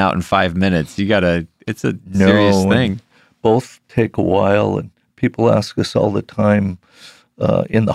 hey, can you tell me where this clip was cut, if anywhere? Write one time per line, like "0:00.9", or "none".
0:03.8